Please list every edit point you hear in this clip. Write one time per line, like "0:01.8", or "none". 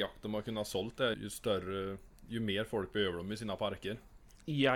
0:01.1